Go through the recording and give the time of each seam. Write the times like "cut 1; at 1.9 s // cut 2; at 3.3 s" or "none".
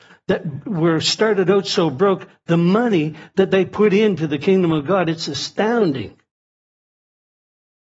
none

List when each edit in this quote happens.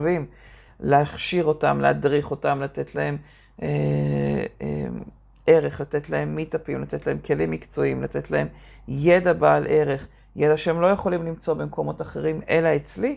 none

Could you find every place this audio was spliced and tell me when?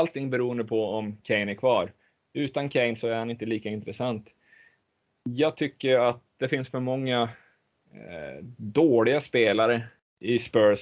none

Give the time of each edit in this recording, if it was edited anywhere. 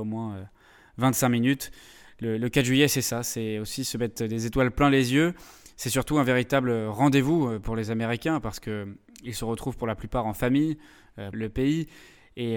cut 1; at 11.3 s

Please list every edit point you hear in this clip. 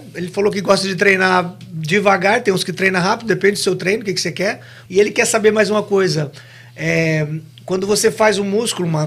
cut 1; at 4.9 s

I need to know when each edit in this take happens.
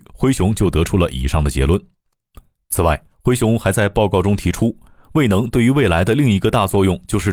none

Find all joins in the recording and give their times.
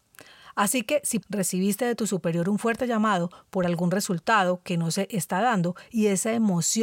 cut 1; at 1.2 s

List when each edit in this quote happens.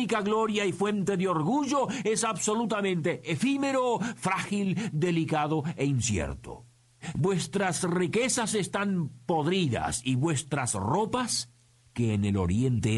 cut 1; at 7.1 s

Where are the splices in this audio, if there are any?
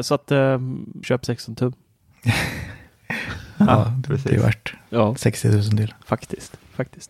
cut 1; at 1.0 s

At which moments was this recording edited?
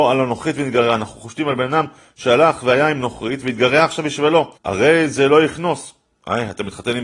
cut 1; at 4.6 s

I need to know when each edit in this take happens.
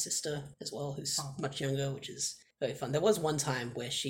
none

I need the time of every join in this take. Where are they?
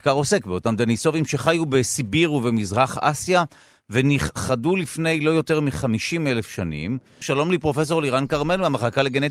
cut 1; at 7.2 s

